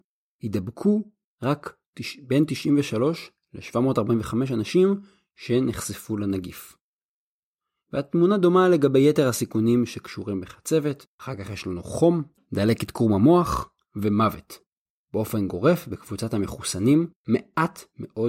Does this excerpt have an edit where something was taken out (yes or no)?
yes